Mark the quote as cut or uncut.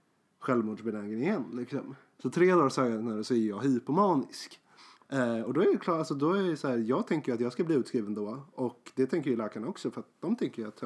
cut